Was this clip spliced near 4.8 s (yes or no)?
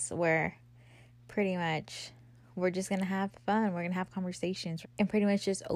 yes